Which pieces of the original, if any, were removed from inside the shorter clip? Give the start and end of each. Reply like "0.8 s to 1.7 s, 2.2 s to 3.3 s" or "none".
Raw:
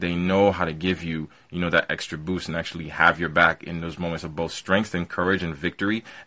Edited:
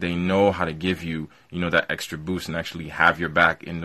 none